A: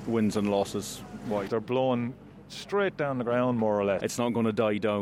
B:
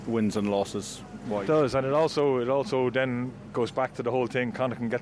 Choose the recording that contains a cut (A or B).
A